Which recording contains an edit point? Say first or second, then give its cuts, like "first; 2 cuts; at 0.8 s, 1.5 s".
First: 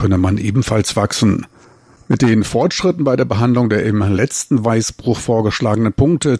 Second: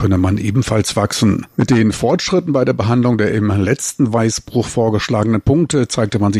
second; 1 cut; at 1.5 s